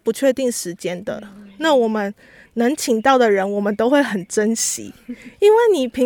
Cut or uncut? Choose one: uncut